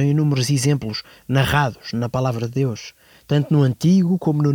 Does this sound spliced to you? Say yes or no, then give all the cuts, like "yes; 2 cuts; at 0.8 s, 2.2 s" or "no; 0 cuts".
no; 0 cuts